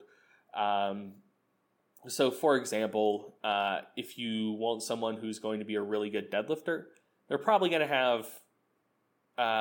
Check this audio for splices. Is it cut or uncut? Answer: uncut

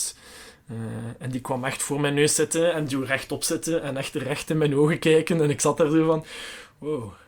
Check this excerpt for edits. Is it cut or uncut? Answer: uncut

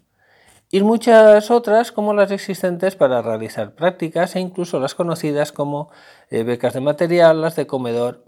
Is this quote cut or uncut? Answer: uncut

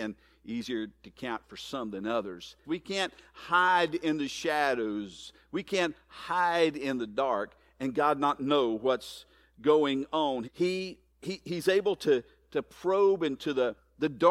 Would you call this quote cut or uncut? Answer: cut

